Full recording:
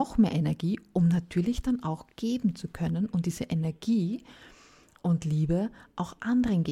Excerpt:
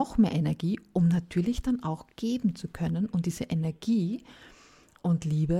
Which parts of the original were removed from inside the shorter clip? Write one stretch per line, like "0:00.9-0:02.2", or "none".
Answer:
none